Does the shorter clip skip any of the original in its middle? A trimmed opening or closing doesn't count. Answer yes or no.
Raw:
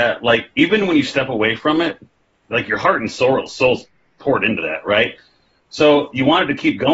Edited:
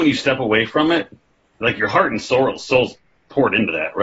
no